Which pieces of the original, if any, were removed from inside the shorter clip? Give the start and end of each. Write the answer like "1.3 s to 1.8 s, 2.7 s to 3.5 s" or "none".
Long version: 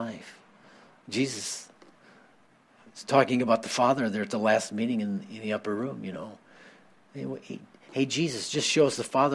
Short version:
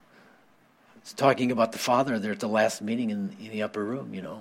none